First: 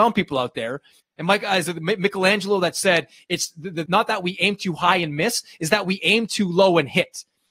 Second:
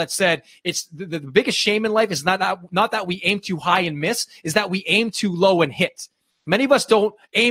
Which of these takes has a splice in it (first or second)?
first